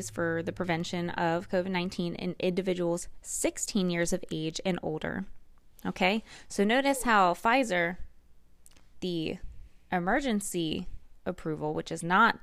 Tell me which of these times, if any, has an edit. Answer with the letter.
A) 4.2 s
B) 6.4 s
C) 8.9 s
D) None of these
D